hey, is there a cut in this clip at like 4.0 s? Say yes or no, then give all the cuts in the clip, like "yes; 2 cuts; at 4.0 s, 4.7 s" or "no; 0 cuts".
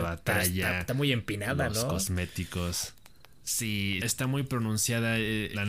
yes; 1 cut; at 4.0 s